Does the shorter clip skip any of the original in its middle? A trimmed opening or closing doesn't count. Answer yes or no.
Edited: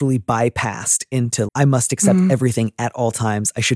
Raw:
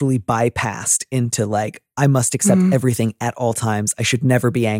yes